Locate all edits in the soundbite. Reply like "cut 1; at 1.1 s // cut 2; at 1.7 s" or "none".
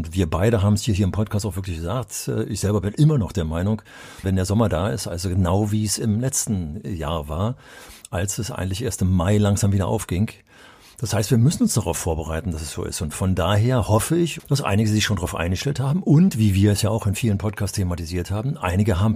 cut 1; at 4.2 s // cut 2; at 14.4 s